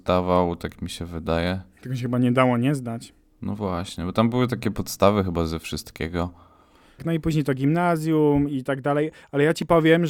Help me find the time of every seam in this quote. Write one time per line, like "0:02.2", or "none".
0:07.0